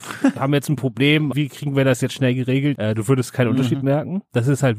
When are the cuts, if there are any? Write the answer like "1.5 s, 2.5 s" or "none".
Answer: 1.3 s, 2.7 s